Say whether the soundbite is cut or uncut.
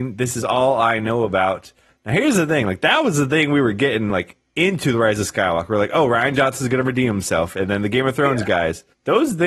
uncut